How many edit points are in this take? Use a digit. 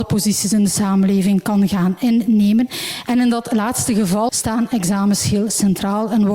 1